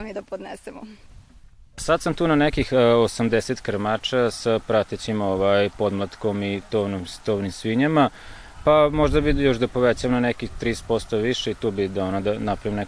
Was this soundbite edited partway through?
no; 0 cuts

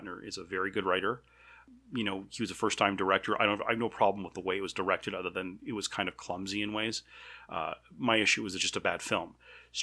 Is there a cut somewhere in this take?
no; 0 cuts

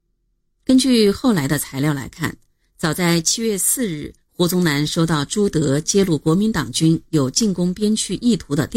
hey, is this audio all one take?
yes; 0 cuts

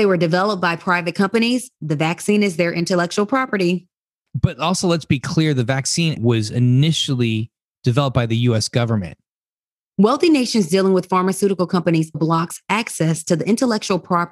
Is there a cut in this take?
yes; 3 cuts; at 6.2 s, 9.8 s, 12.1 s

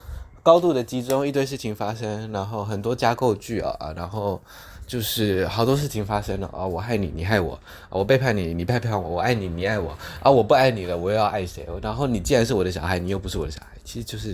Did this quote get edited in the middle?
no; 0 cuts

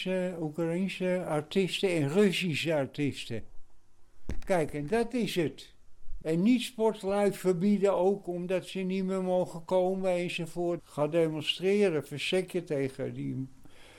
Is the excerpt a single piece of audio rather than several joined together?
no; 2 cuts; at 6.2 s, 10.8 s

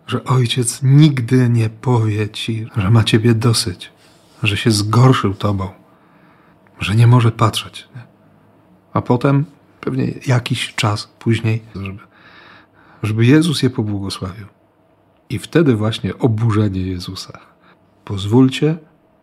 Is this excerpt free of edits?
no; 2 cuts; at 2.7 s, 11.7 s

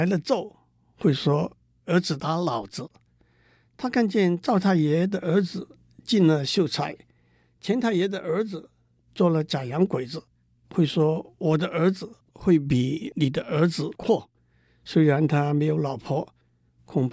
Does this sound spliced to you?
no; 0 cuts

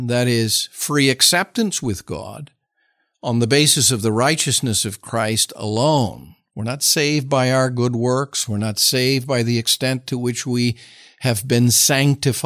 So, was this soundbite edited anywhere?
no; 0 cuts

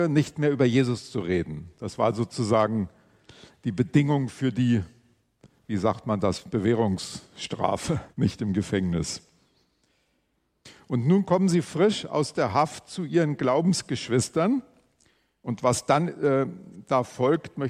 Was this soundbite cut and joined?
yes; 1 cut; at 8.1 s

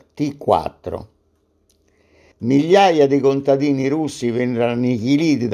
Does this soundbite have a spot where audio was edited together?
yes; 1 cut; at 2.3 s

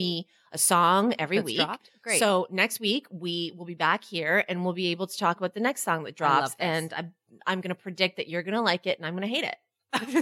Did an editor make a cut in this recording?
no; 0 cuts

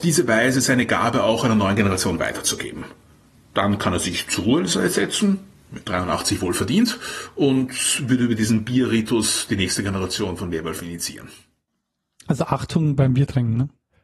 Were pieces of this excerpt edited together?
no; 0 cuts

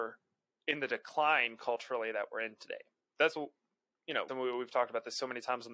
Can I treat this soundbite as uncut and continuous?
no; 1 cut; at 4.3 s

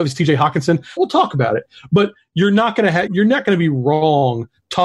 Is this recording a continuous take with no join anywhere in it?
no; 2 cuts; at 1.0 s, 3.1 s

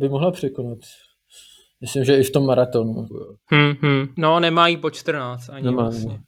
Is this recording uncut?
no; 2 cuts; at 3.1 s, 4.1 s

